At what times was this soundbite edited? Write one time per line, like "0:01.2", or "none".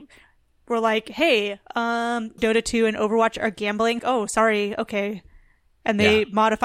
0:02.4
0:04.0